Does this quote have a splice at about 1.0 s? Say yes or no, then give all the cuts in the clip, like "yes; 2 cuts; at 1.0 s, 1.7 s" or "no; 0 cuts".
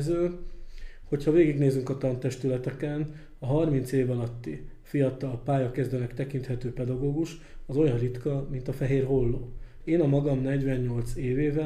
no; 1 cut; at 9.8 s